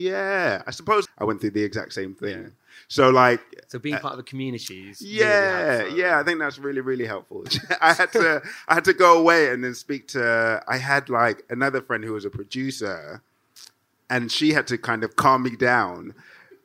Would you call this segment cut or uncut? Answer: cut